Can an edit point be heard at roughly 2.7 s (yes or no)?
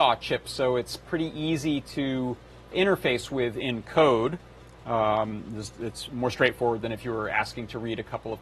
yes